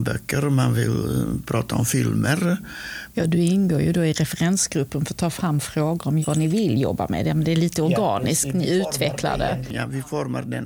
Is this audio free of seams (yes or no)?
no